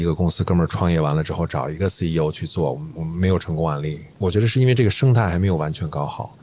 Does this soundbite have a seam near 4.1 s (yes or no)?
no